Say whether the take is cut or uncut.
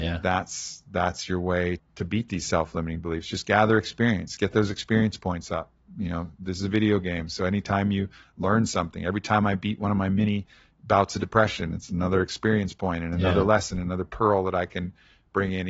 cut